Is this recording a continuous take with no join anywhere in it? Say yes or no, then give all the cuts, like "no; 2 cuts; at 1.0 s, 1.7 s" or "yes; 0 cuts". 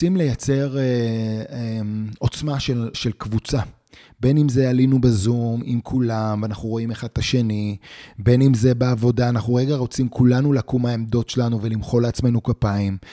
no; 1 cut; at 2.9 s